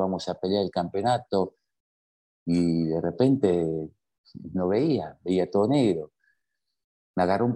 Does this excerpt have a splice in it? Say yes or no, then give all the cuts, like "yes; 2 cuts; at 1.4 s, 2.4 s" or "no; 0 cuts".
no; 0 cuts